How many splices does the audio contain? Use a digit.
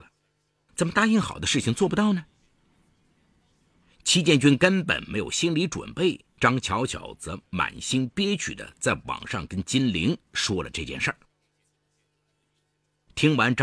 1